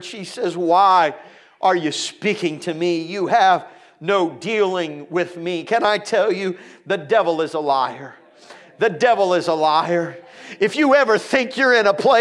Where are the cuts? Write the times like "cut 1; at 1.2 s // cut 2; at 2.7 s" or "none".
none